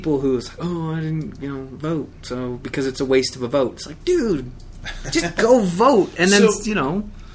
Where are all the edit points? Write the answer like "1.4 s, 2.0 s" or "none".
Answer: none